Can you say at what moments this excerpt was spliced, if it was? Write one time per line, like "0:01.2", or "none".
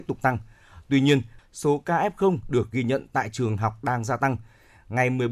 0:01.4

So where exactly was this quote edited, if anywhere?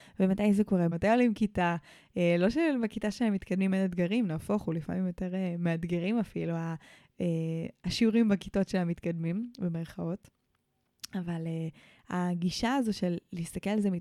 0:00.9

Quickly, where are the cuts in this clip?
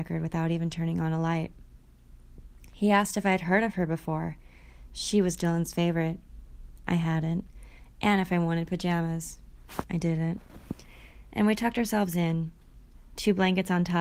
none

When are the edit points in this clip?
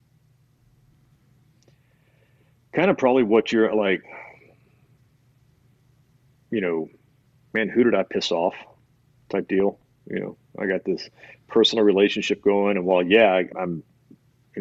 0:07.5
0:13.5

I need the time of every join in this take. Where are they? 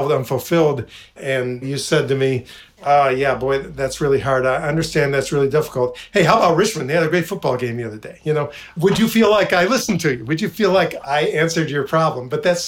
none

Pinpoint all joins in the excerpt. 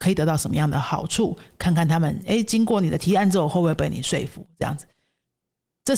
none

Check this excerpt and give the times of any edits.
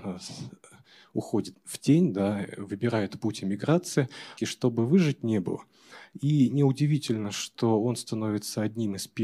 0:01.5
0:04.4

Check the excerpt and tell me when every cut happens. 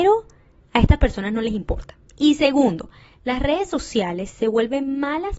none

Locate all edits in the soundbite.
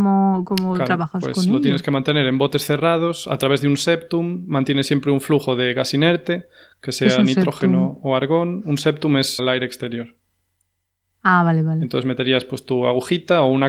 0:09.4

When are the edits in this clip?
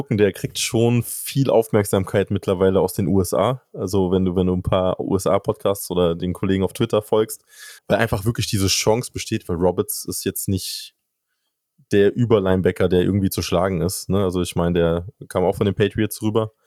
0:07.8

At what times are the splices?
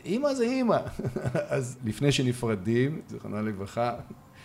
0:03.1

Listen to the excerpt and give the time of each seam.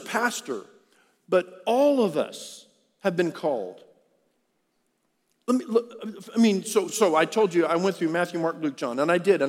none

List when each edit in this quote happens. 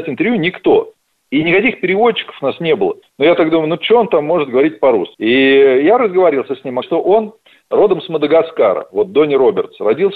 0:03.0
0:05.1
0:06.8

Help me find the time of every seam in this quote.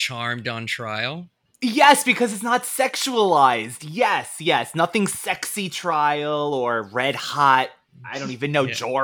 0:04.4

